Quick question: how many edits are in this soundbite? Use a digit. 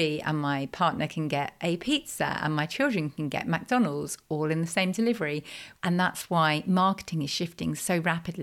1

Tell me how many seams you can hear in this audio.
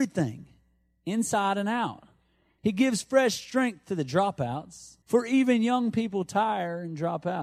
2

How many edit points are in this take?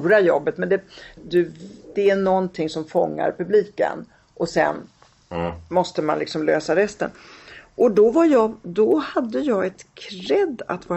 1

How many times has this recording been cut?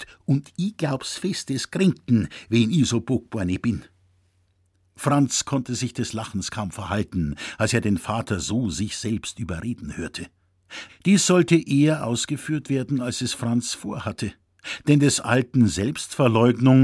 1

